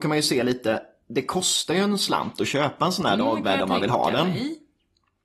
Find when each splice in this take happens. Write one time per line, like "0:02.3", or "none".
none